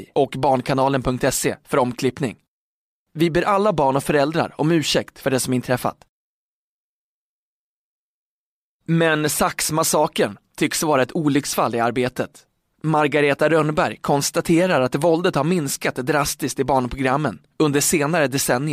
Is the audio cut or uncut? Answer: uncut